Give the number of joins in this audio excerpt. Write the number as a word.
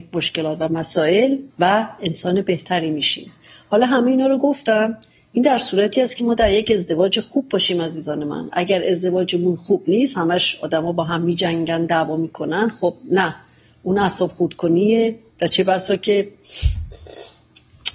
one